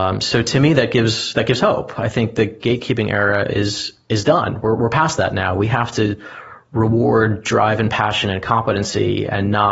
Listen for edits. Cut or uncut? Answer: uncut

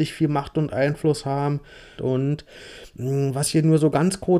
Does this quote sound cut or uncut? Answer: cut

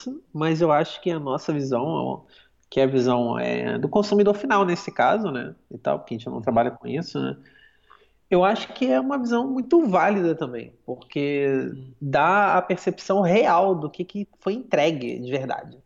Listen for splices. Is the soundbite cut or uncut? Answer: uncut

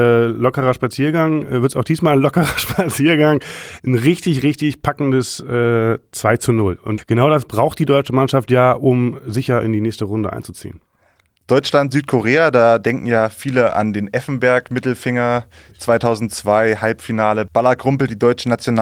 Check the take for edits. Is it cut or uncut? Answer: uncut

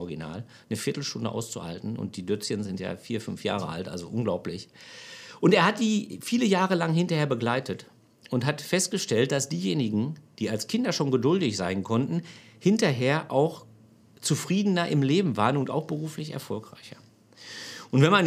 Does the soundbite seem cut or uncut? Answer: uncut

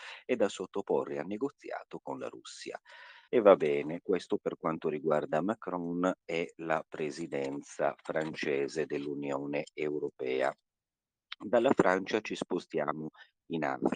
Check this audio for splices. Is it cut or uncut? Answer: cut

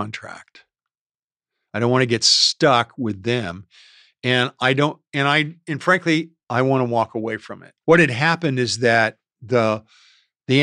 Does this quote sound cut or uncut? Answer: cut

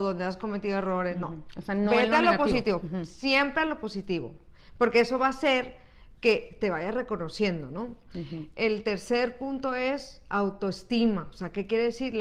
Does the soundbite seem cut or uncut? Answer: uncut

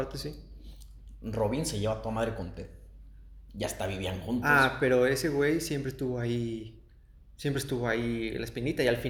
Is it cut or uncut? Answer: uncut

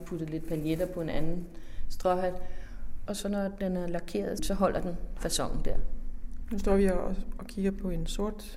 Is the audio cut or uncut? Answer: cut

